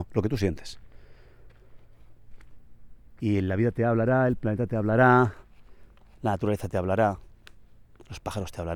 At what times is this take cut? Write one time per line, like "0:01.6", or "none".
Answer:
0:03.2